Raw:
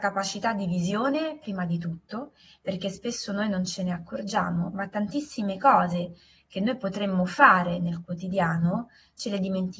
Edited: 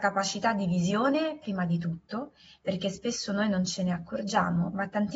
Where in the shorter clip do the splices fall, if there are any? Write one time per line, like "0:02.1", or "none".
none